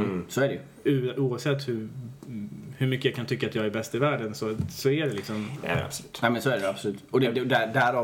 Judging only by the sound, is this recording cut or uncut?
uncut